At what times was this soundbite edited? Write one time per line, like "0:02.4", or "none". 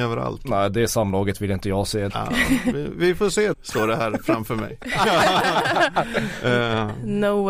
0:02.1
0:03.5

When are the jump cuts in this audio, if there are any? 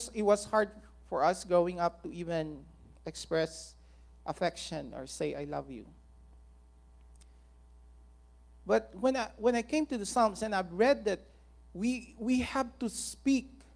none

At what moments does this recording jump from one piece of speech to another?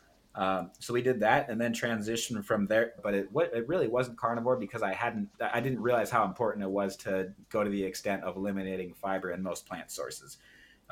0:03.0
0:05.3
0:07.4

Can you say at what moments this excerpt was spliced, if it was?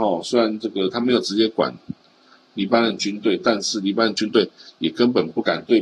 none

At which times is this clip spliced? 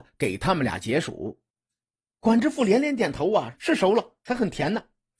0:01.5
0:03.5

